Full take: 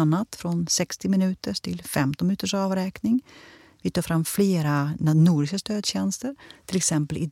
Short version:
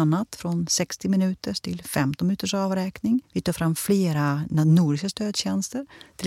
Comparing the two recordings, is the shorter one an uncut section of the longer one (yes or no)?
no